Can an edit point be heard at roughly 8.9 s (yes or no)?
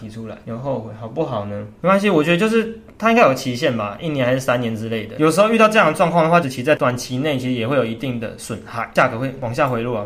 no